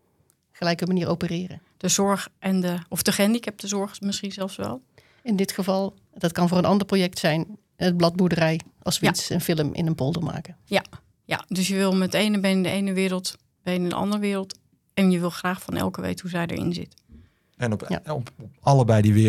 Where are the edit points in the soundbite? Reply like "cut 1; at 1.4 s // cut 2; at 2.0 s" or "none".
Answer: none